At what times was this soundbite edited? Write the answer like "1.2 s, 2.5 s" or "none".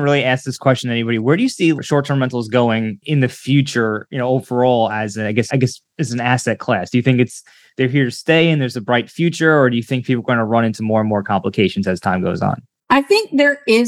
5.5 s

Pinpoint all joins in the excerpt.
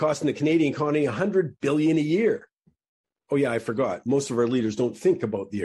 none

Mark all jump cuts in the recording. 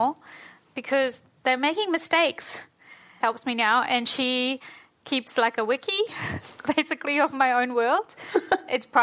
3.2 s

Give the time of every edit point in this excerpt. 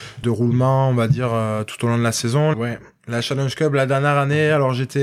2.5 s

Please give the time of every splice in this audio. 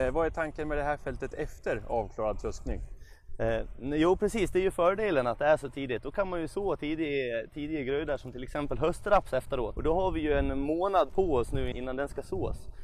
9.8 s, 11.7 s

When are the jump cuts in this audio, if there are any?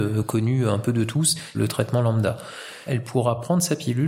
1.5 s, 2.9 s

